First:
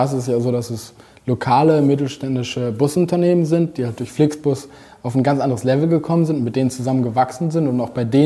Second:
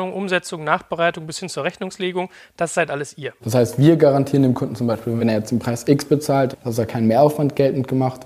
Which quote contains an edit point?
second; 3 cuts; at 3.4 s, 5.2 s, 6.5 s

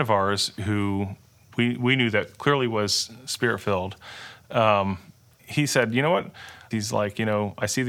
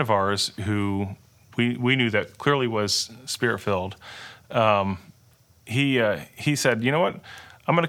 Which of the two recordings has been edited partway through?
first; 2 cuts; at 5.4 s, 6.7 s

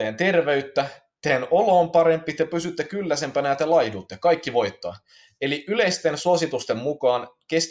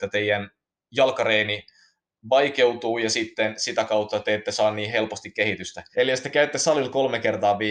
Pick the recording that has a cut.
second; 1 cut; at 5.9 s

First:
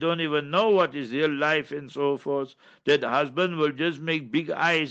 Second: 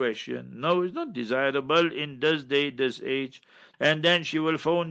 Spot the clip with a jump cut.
second; 1 cut; at 3.7 s

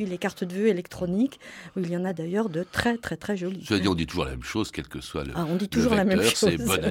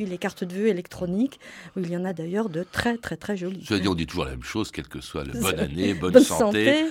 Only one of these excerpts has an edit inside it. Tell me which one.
second; 1 cut; at 5.3 s

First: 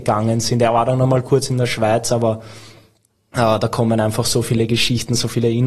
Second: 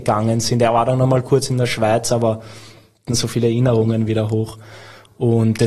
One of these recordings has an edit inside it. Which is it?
second; 1 cut; at 3.1 s

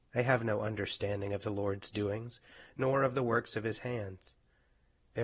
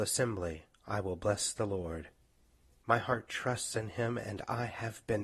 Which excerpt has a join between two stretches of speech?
second; 1 cut; at 2.8 s

